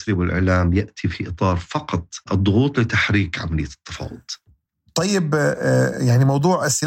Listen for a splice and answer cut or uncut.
cut